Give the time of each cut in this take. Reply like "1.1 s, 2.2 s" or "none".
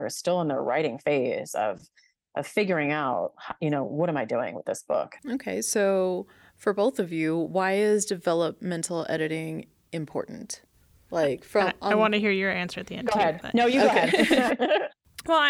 14.5 s

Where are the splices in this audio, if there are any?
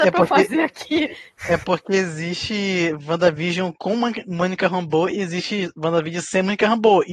none

